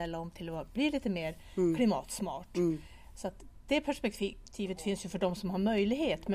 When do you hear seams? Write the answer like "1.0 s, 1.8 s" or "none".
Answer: none